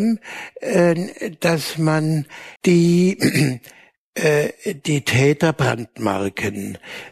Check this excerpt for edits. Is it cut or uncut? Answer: cut